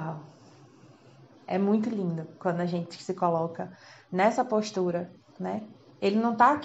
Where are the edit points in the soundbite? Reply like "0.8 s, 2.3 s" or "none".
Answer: none